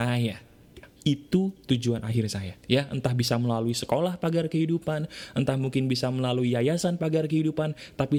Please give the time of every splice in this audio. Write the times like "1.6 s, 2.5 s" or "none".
0.9 s, 2.6 s